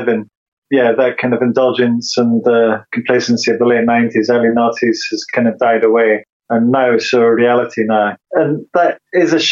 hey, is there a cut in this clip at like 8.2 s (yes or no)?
yes